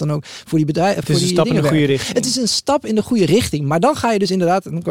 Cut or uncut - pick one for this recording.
uncut